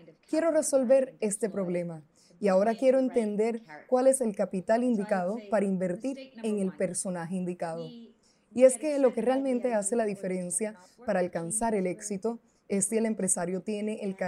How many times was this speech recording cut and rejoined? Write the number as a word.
zero